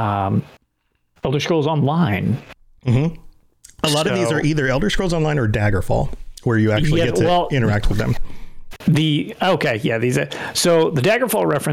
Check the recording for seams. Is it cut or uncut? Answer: cut